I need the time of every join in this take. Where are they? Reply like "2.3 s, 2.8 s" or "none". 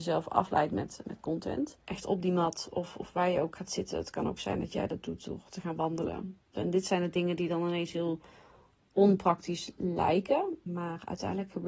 1.8 s, 6.5 s, 10.7 s